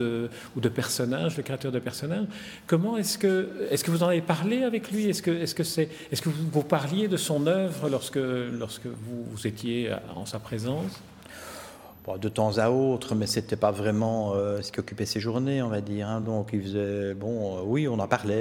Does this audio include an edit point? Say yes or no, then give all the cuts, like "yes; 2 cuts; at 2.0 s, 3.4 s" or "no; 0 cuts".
no; 0 cuts